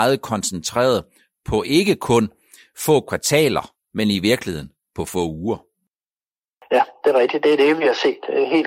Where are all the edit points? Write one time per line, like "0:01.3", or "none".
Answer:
none